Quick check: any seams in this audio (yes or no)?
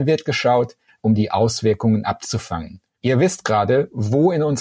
yes